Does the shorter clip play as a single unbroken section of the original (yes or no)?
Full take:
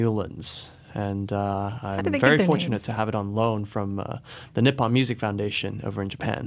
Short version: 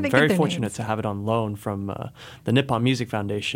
yes